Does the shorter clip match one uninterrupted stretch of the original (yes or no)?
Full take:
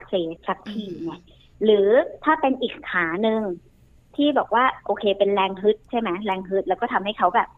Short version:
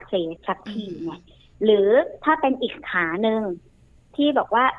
yes